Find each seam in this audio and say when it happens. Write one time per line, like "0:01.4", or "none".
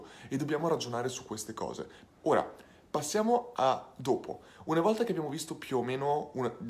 0:02.1